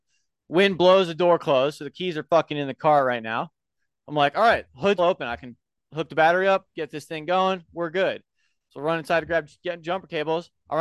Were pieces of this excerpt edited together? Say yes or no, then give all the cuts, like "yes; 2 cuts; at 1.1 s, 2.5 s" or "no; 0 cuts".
yes; 1 cut; at 5.0 s